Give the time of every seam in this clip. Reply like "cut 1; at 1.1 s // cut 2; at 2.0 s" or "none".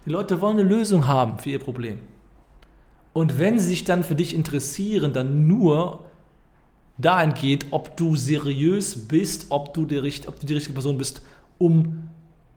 cut 1; at 9.5 s